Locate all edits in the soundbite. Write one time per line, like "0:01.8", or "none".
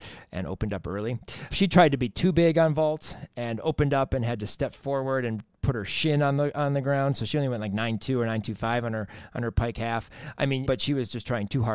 0:01.5
0:10.7